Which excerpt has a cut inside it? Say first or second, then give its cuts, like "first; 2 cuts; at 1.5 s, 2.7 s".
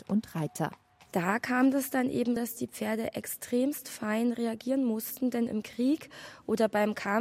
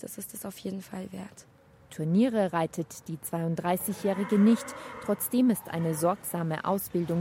first; 1 cut; at 2.4 s